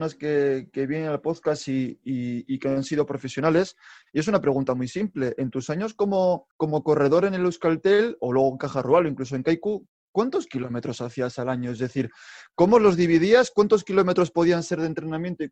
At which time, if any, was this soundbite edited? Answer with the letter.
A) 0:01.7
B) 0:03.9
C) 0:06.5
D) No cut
C